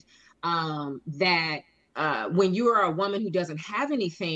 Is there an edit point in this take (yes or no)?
no